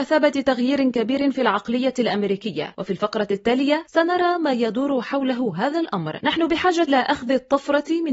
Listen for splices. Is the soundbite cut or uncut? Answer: cut